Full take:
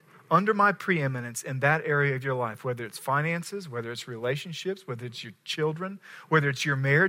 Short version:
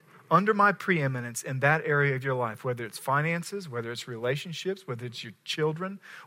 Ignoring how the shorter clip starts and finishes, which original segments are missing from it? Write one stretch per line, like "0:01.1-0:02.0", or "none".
none